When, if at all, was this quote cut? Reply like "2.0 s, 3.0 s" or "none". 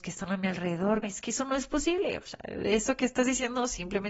1.0 s